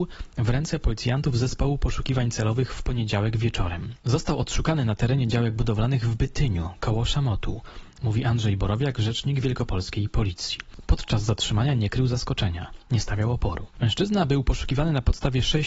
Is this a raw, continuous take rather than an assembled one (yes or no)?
yes